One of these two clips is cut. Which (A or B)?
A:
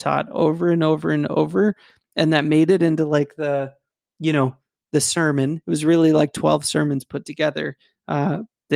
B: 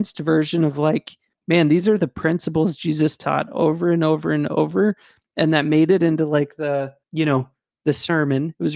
B